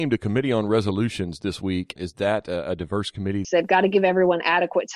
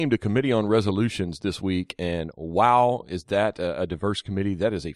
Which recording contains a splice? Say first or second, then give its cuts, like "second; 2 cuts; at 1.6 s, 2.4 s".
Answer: first; 2 cuts; at 2.0 s, 3.4 s